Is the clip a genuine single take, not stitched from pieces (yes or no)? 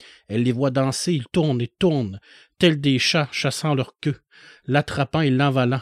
no